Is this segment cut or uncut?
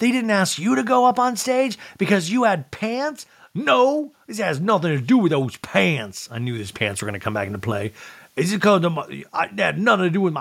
uncut